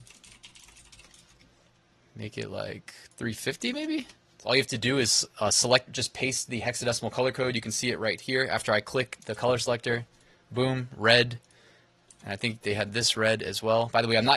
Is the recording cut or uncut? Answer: cut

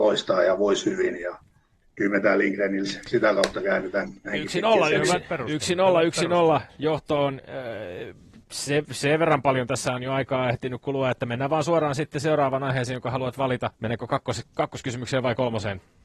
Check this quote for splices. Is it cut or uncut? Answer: uncut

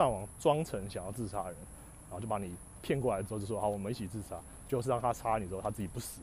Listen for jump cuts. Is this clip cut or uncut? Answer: uncut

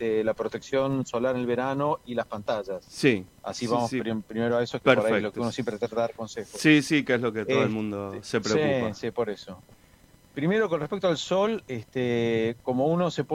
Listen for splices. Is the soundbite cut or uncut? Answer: uncut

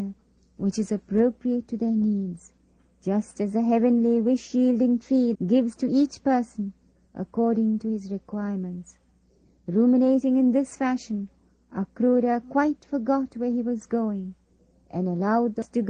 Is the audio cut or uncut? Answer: cut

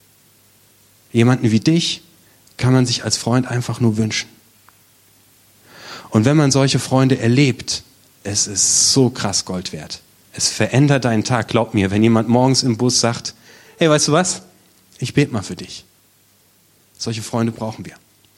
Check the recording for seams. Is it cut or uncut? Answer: uncut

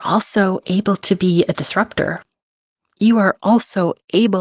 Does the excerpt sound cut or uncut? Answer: uncut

